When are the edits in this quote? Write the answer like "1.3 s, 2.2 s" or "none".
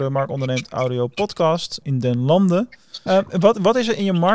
1.8 s, 3.1 s